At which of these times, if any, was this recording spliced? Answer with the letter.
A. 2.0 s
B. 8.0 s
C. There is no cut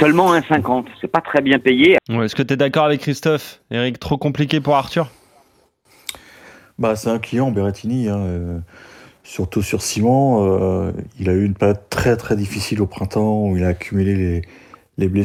A